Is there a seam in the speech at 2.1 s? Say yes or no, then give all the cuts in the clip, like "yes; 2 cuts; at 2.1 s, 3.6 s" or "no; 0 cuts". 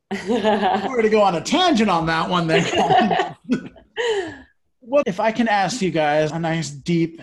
no; 2 cuts; at 5.0 s, 6.3 s